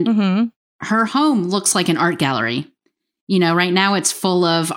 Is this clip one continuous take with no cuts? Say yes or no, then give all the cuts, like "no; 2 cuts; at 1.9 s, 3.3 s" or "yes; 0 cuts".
yes; 0 cuts